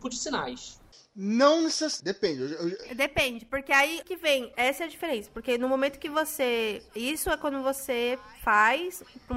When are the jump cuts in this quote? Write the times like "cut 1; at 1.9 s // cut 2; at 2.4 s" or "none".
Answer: cut 1; at 2.0 s